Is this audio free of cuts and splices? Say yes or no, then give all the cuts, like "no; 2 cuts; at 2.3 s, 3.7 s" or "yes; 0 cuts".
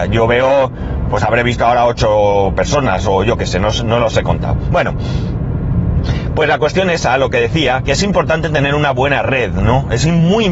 yes; 0 cuts